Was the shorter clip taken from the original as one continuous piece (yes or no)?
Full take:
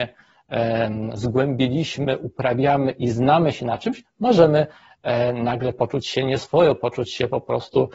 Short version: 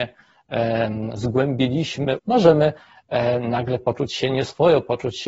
no